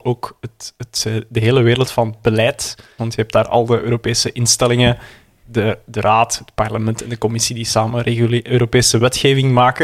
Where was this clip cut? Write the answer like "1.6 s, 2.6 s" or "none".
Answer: 3.0 s